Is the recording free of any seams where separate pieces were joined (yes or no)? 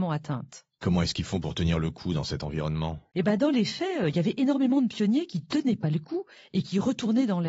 yes